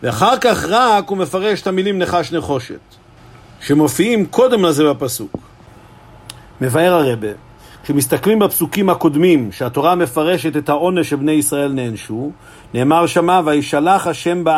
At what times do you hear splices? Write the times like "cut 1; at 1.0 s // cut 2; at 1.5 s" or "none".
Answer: none